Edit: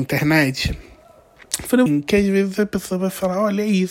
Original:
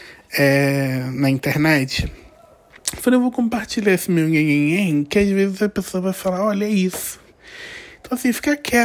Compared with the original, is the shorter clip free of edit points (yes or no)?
no